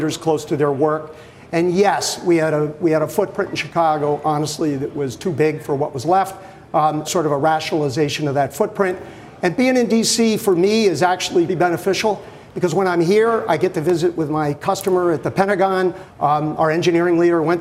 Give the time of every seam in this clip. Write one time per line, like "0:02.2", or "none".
0:07.0
0:11.5
0:16.1